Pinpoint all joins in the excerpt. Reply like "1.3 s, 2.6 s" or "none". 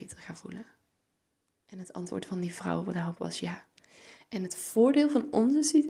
1.7 s